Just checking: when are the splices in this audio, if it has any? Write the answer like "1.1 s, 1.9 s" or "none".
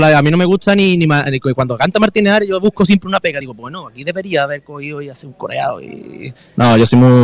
none